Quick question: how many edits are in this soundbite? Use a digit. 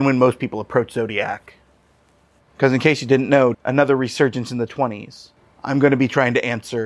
3